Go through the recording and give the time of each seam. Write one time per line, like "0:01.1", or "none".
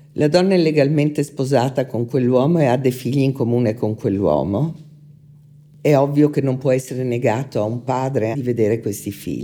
0:08.3